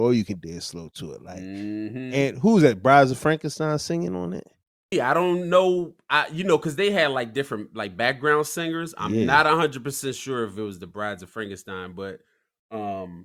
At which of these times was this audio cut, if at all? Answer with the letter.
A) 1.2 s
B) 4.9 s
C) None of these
B